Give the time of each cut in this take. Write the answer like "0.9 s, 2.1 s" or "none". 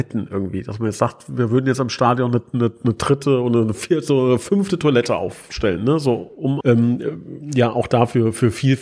6.6 s